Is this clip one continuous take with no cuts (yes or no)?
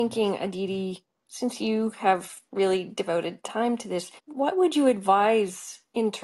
no